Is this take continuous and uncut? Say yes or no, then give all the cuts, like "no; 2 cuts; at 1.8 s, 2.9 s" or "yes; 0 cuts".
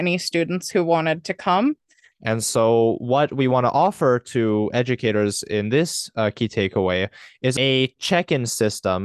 no; 1 cut; at 2.1 s